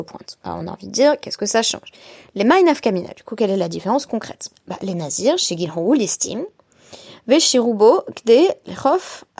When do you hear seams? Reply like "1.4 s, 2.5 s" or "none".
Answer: none